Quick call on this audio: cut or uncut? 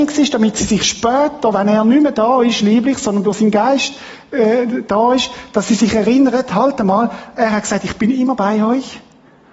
uncut